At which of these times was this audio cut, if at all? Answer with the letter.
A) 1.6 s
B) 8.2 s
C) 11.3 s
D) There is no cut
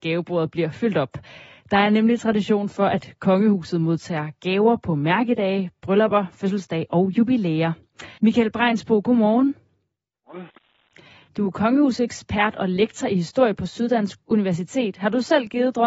B